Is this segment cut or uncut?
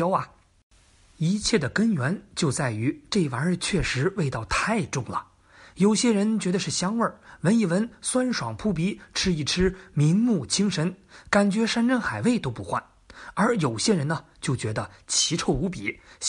uncut